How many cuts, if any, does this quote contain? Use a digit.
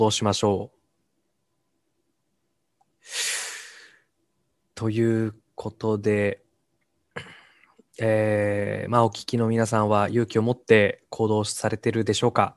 0